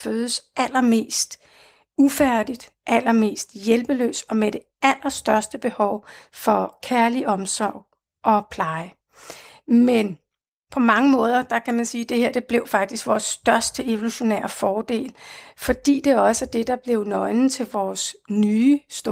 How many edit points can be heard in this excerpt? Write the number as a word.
zero